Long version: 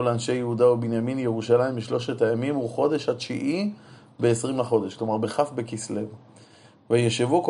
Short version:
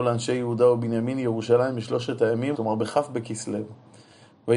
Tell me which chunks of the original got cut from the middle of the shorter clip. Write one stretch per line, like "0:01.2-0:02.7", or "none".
0:02.5-0:05.0